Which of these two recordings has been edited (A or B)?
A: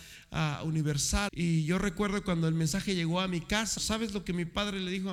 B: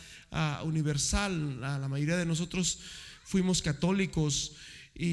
A